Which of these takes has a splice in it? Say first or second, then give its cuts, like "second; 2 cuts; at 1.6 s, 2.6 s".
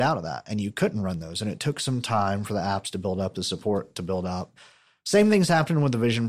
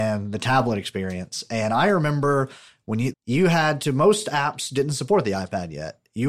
second; 1 cut; at 3.1 s